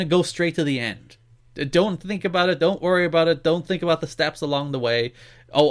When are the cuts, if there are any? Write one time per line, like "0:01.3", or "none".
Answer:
none